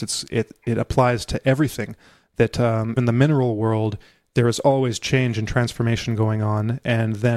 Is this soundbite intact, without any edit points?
no; 1 cut; at 3.0 s

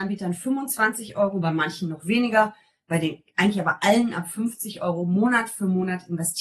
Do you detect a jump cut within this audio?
no; 0 cuts

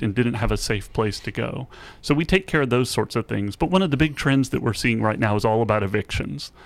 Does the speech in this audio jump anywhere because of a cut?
no; 0 cuts

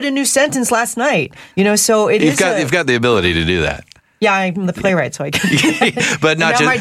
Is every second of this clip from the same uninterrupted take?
no; 1 cut; at 1.5 s

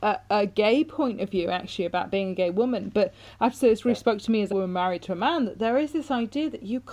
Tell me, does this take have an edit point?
no; 0 cuts

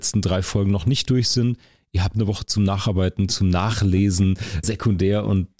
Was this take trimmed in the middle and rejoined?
yes; 2 cuts; at 3.3 s, 4.6 s

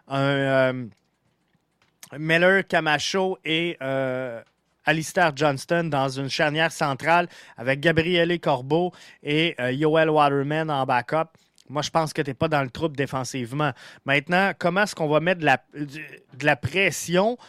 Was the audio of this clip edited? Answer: no; 0 cuts

